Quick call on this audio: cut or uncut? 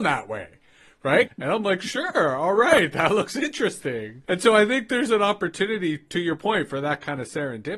cut